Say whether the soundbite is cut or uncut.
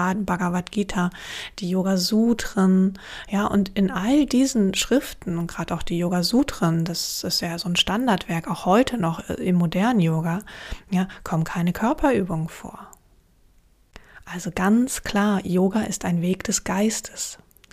uncut